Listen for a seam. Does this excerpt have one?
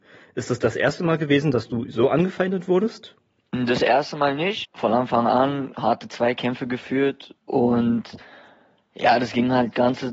yes; 2 cuts; at 4.6 s, 7.4 s

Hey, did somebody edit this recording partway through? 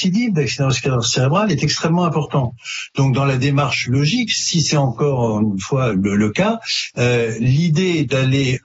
yes; 1 cut; at 5.9 s

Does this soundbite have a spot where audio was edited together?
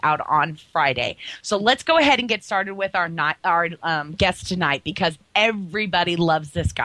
no; 0 cuts

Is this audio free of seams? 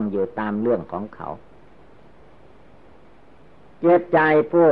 yes; 0 cuts

